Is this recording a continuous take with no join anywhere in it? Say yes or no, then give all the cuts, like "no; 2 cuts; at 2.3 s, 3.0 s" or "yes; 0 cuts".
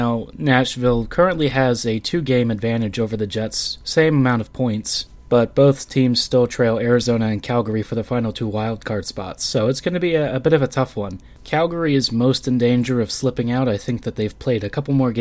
yes; 0 cuts